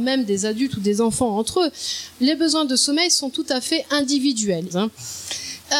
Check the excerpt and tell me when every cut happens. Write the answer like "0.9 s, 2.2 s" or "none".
4.7 s